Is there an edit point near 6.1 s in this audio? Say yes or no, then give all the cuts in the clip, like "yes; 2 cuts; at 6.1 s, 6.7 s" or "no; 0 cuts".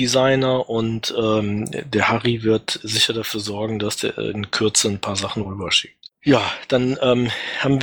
yes; 1 cut; at 6.1 s